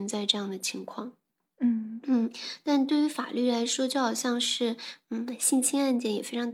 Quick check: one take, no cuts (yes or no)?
yes